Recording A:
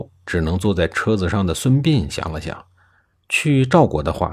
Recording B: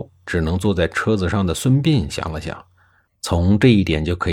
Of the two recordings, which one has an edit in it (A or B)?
B